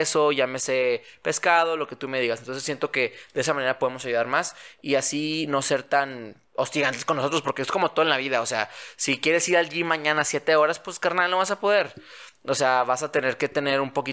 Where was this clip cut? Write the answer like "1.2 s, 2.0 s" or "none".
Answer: none